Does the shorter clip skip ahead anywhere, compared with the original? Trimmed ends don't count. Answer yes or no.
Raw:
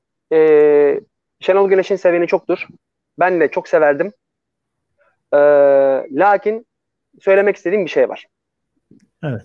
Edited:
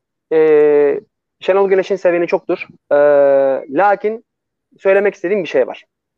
yes